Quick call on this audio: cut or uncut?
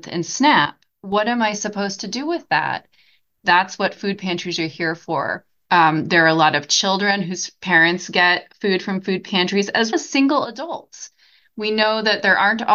cut